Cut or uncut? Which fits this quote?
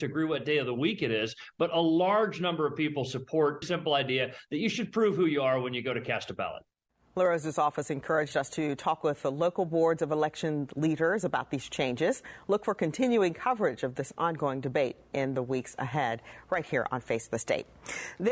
cut